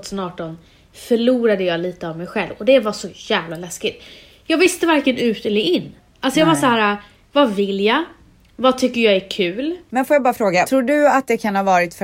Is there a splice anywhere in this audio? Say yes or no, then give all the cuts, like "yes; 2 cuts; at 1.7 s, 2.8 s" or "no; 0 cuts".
yes; 1 cut; at 9.9 s